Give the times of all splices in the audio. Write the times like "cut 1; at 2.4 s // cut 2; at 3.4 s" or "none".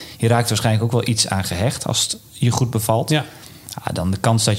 none